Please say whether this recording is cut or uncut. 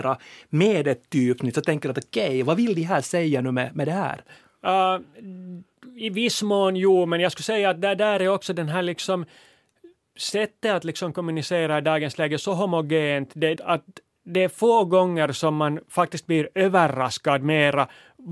cut